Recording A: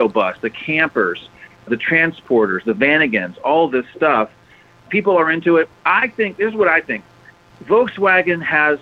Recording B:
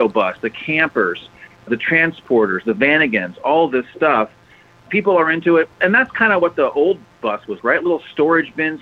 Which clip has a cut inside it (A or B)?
B